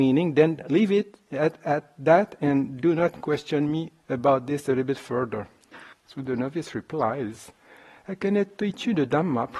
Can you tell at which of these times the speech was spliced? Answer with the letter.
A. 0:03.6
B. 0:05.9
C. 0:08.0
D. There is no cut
B